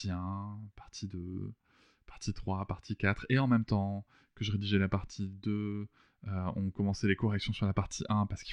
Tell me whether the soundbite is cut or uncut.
uncut